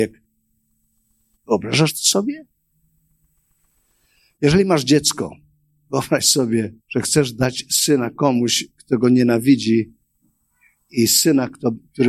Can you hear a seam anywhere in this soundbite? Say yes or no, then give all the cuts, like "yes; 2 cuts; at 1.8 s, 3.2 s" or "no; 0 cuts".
yes; 3 cuts; at 1.4 s, 4.4 s, 6.8 s